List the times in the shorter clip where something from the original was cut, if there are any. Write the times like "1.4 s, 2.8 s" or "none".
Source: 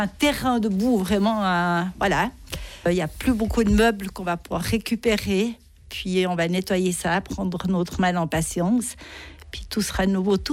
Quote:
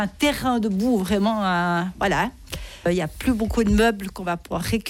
none